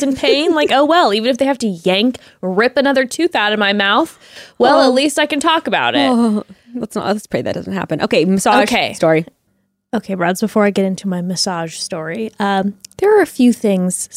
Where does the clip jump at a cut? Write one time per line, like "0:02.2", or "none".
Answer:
none